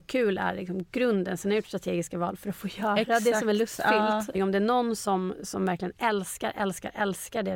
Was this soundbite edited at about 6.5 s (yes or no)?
no